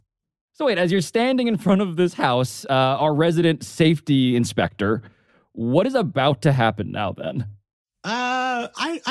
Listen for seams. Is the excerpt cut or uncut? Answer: uncut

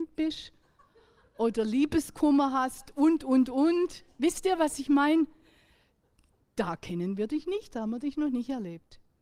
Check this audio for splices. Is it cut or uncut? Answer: uncut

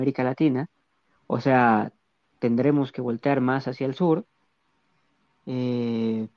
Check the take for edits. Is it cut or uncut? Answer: uncut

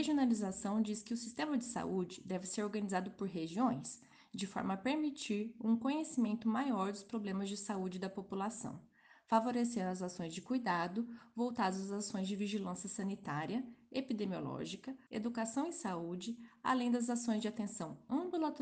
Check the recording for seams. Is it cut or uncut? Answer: cut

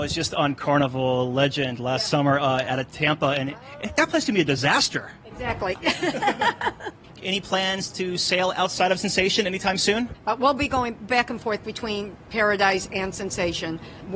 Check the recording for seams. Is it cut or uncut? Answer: uncut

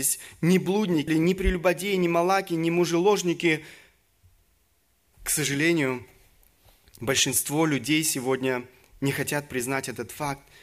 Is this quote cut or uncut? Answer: cut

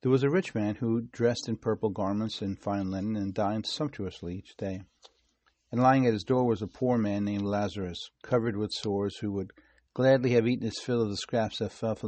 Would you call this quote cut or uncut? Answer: uncut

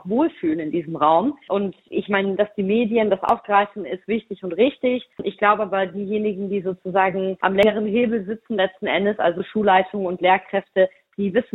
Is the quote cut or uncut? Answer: uncut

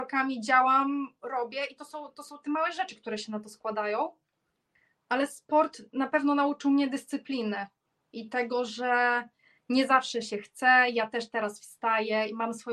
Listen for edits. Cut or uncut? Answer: uncut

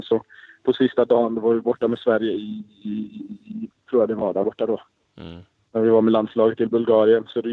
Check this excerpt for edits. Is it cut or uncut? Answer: cut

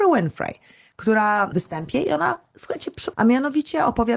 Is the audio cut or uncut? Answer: cut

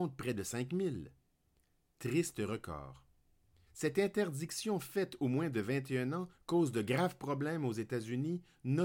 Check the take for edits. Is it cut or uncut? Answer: cut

